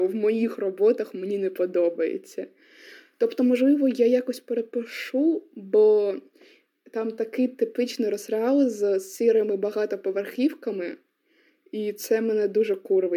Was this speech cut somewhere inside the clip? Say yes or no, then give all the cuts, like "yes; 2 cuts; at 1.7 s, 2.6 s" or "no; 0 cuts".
no; 0 cuts